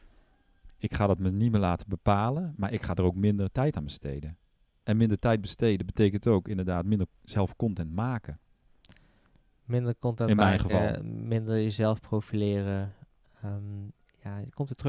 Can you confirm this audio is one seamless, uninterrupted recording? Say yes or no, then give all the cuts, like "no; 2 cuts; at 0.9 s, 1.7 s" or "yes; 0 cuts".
yes; 0 cuts